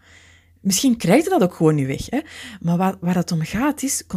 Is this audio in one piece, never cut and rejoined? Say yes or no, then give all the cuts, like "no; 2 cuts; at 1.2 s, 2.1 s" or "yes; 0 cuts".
no; 1 cut; at 1.0 s